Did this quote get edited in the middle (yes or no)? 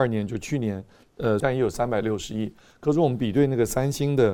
yes